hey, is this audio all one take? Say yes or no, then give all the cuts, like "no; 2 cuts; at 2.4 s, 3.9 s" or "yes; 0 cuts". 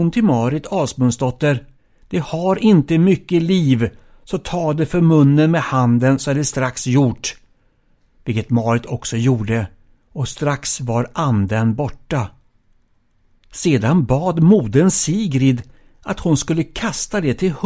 yes; 0 cuts